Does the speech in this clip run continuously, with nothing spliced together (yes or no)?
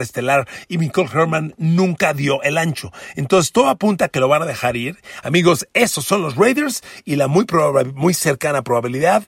no